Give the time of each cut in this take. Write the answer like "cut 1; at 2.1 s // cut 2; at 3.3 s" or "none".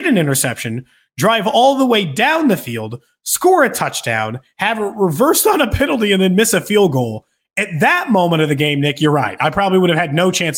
none